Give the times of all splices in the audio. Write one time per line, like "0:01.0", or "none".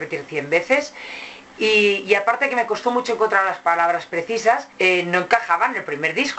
0:04.7